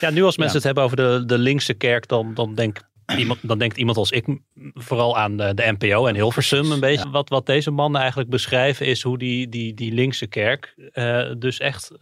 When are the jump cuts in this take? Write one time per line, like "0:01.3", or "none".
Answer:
0:07.0